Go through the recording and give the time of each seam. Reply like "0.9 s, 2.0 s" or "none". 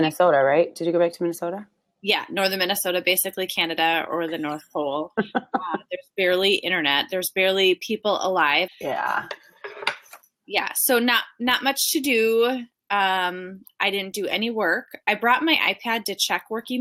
8.7 s